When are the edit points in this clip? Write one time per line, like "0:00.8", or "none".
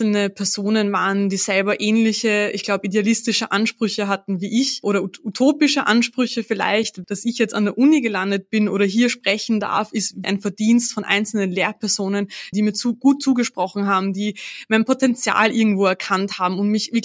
0:07.0
0:10.2
0:12.5